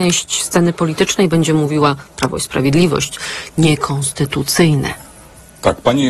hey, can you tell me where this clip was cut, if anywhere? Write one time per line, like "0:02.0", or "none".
none